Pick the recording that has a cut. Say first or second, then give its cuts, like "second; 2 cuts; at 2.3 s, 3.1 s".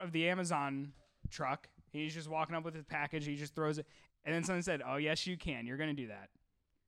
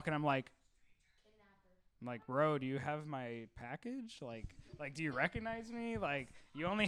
first; 1 cut; at 4.1 s